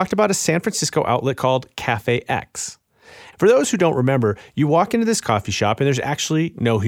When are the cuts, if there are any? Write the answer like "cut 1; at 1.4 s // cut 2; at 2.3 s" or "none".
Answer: cut 1; at 3.3 s